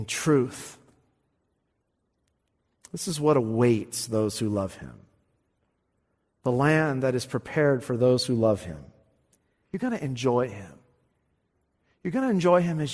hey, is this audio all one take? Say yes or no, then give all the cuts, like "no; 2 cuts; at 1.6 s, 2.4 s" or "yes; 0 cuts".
no; 1 cut; at 9.6 s